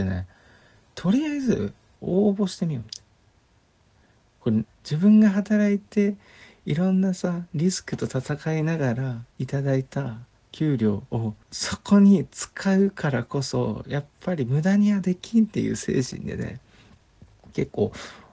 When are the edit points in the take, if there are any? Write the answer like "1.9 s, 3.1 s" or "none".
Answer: 4.6 s, 9.3 s, 11.4 s